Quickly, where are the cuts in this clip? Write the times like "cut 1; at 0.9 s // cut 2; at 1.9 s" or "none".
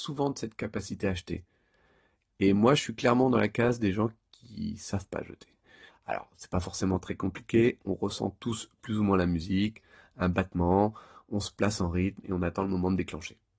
cut 1; at 5.9 s